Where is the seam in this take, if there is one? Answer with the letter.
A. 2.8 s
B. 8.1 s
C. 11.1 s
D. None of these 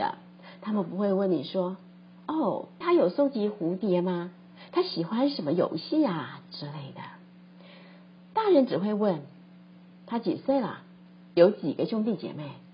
A